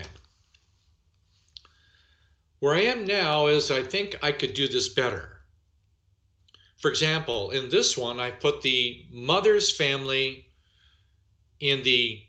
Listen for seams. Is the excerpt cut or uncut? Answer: uncut